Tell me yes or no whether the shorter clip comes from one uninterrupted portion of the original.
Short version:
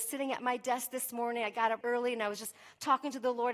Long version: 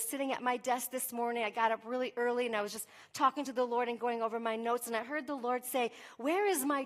no